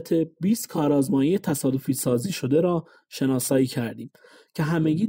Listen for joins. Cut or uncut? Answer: uncut